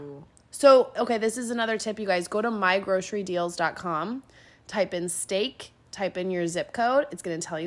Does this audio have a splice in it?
no; 0 cuts

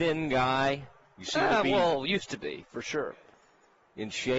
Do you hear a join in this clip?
no; 0 cuts

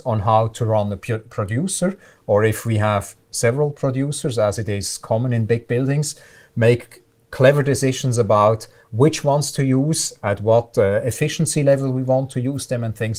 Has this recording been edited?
no; 0 cuts

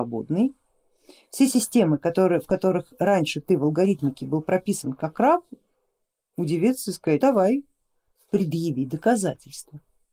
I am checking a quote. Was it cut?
yes; 1 cut; at 7.2 s

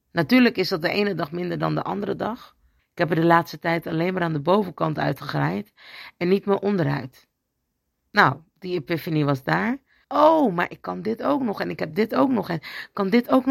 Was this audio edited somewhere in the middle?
yes; 2 cuts; at 2.8 s, 10.0 s

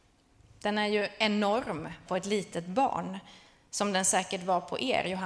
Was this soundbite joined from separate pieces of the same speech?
yes; 1 cut; at 2.1 s

